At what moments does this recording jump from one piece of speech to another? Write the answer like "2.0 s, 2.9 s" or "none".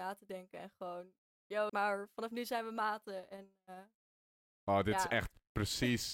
1.7 s